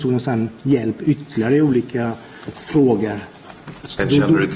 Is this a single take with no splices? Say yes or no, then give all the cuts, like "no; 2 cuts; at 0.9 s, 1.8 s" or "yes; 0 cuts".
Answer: no; 1 cut; at 2.5 s